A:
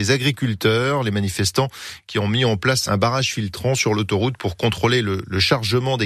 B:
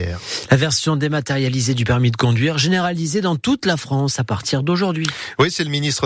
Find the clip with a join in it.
A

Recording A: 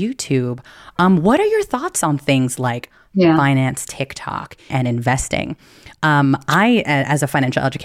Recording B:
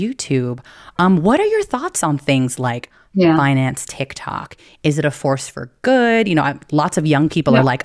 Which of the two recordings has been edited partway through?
A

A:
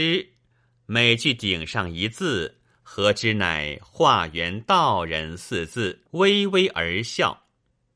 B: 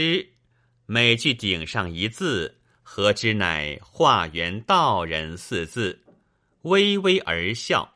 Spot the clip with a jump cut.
A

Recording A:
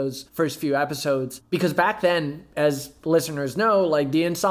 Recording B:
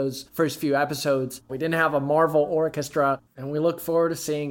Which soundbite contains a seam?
B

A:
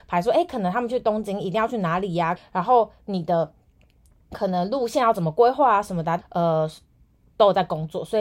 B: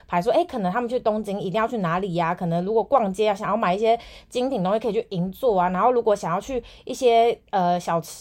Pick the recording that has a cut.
A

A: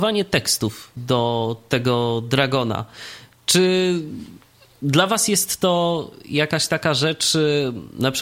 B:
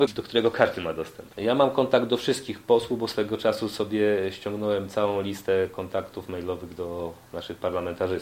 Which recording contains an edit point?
B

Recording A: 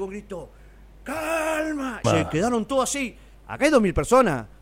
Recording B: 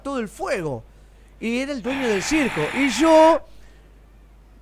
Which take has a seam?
A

